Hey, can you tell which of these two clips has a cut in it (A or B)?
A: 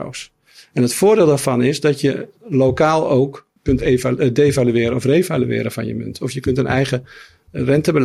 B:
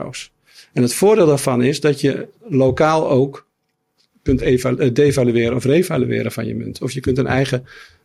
A